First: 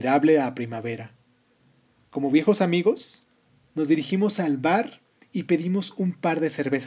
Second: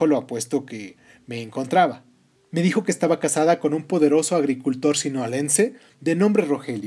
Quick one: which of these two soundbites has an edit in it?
second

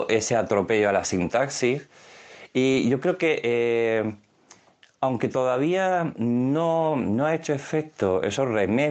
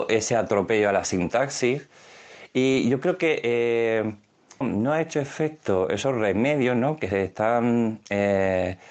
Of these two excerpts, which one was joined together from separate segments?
second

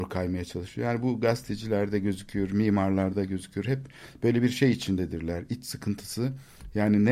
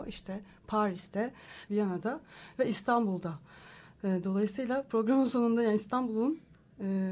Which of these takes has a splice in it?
second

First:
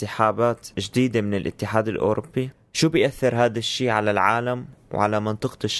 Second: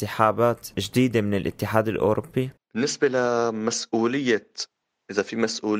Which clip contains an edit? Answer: second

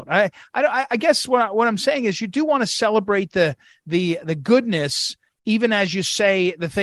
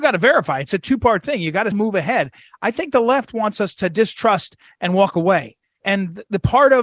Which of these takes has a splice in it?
second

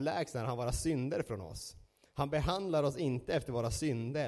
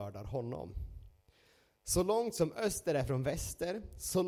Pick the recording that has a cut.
first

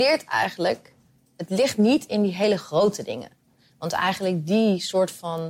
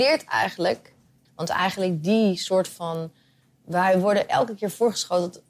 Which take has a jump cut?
second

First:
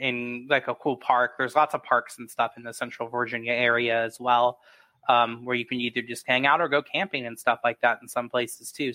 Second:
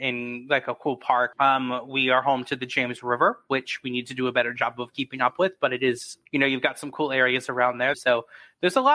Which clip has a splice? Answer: second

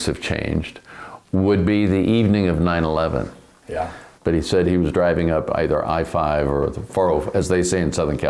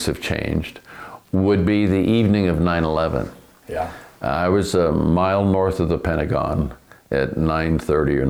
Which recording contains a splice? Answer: first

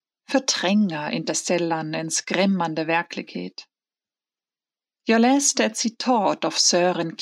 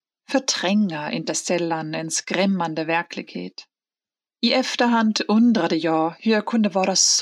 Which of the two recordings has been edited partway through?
second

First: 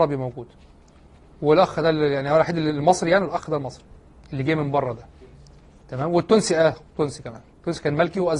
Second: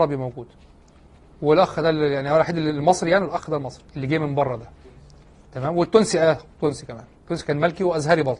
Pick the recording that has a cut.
second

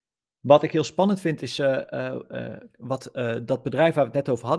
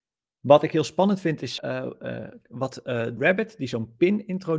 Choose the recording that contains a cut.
second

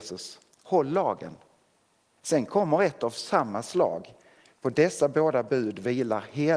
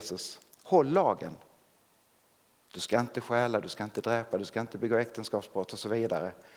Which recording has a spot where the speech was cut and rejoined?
first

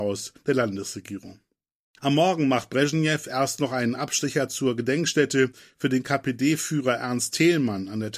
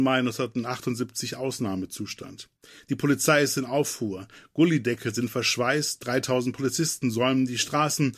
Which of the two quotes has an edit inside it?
first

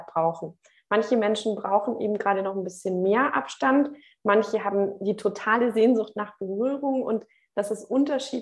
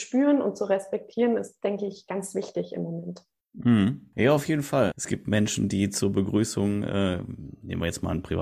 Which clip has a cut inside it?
second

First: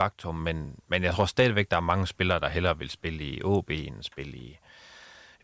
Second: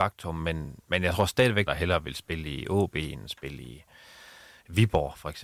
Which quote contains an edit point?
second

